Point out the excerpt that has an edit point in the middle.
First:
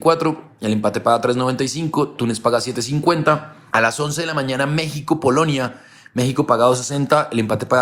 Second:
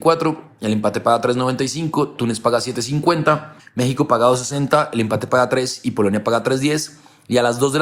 second; 1 cut; at 3.6 s

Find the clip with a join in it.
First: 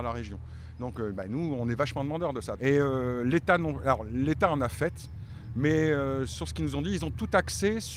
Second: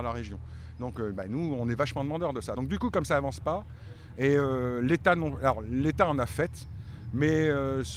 first; 1 cut; at 2.6 s

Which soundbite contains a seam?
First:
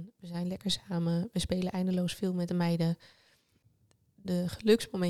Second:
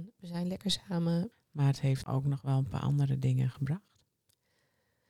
second; 1 cut; at 1.3 s

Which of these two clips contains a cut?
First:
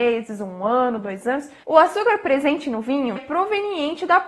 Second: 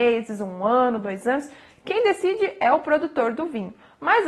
first; 2 cuts; at 1.6 s, 3.2 s

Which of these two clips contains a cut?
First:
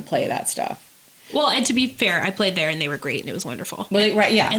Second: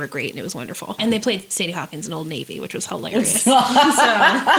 second; 1 cut; at 1.0 s

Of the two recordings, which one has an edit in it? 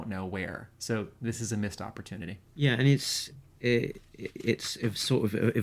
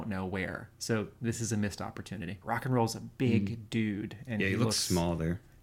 second; 1 cut; at 2.4 s

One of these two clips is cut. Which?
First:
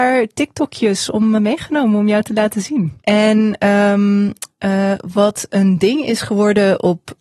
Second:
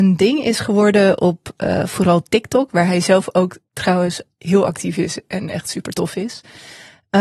first; 2 cuts; at 1.4 s, 3.0 s

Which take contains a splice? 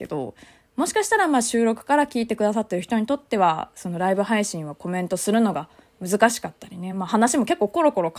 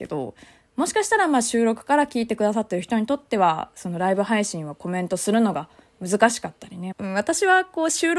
second; 1 cut; at 6.9 s

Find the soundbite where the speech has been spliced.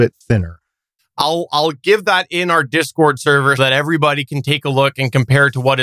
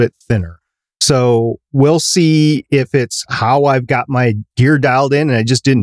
first; 2 cuts; at 1.0 s, 3.6 s

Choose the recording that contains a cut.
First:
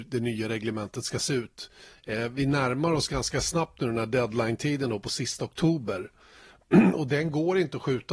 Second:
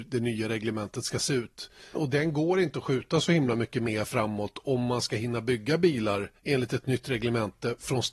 second; 1 cut; at 1.9 s

